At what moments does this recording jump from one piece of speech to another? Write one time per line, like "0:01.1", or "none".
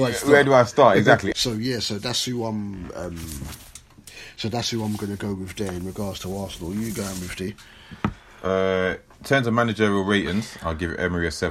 0:01.3